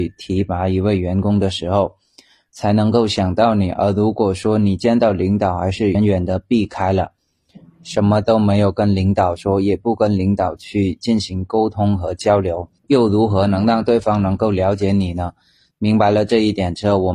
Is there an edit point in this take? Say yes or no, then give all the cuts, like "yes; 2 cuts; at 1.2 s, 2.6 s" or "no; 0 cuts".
yes; 3 cuts; at 5.9 s, 12.8 s, 15.7 s